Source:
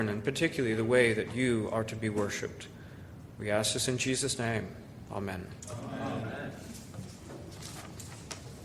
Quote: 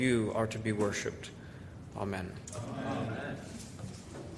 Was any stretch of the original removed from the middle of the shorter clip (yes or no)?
yes